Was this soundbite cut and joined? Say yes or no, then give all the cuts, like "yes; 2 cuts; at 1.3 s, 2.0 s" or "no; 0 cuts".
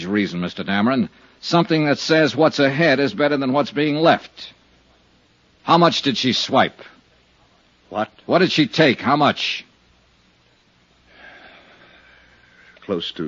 no; 0 cuts